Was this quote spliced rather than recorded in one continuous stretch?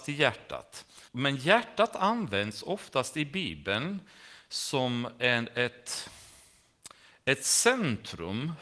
yes; 1 cut; at 1.1 s

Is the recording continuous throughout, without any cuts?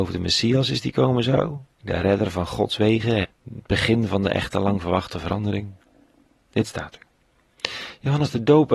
no; 2 cuts; at 1.8 s, 3.2 s

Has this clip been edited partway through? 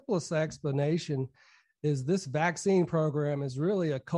no; 0 cuts

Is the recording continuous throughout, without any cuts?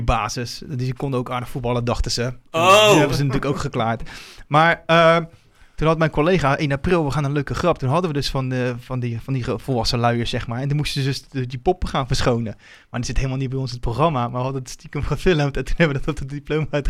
yes; 0 cuts

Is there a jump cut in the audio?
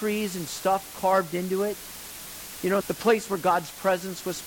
yes; 1 cut; at 2.8 s

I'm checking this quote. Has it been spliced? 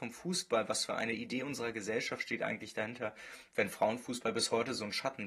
no; 0 cuts

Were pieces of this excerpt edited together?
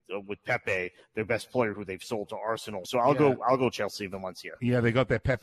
yes; 1 cut; at 2.8 s

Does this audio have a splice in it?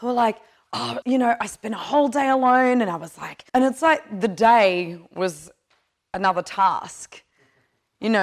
yes; 2 cuts; at 1.0 s, 3.5 s

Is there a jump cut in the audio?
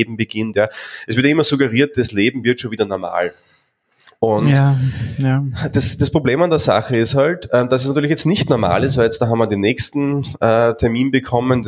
no; 0 cuts

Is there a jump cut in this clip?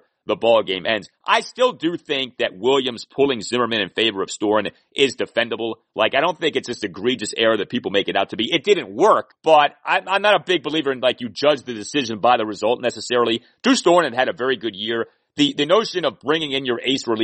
yes; 1 cut; at 9.3 s

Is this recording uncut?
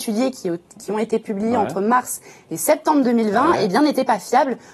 yes; 0 cuts

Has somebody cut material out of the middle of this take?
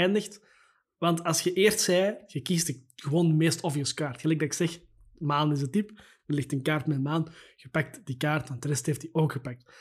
no; 0 cuts

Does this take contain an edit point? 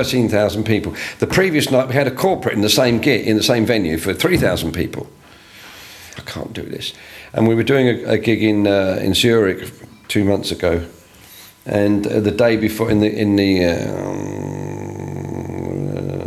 yes; 1 cut; at 6.2 s

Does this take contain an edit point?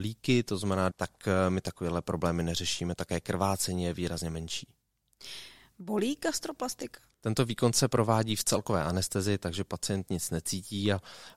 yes; 2 cuts; at 0.9 s, 7.1 s

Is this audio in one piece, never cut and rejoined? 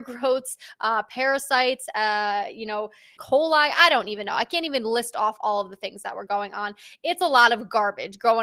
no; 1 cut; at 3.2 s

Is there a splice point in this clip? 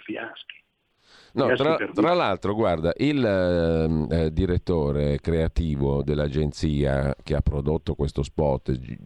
no; 0 cuts

